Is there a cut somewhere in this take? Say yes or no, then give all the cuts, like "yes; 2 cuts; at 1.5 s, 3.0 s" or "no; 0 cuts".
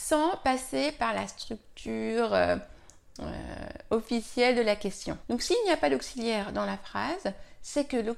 yes; 1 cut; at 5.2 s